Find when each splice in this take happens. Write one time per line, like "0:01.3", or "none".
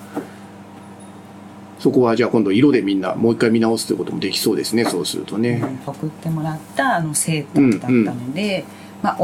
0:05.9